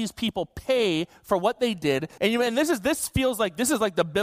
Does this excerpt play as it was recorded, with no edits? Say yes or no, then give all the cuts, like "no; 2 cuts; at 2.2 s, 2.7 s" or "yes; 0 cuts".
no; 1 cut; at 2.2 s